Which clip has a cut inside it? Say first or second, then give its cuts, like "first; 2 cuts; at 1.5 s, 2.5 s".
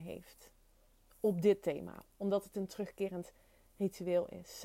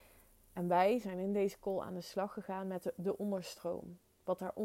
first; 1 cut; at 2.0 s